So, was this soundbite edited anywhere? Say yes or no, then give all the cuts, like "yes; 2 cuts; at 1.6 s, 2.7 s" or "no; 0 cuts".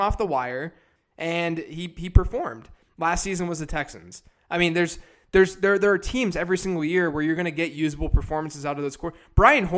yes; 2 cuts; at 1.0 s, 2.8 s